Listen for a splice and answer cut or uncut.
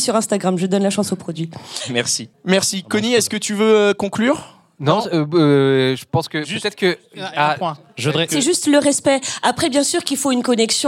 cut